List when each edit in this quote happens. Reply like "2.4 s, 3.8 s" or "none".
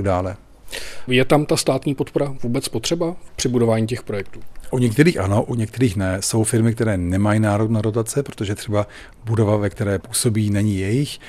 1.1 s